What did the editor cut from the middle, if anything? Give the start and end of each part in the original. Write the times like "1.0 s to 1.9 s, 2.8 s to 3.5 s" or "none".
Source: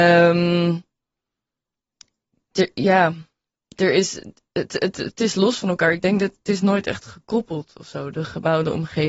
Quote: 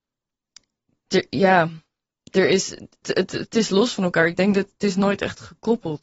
4.5 s to 4.7 s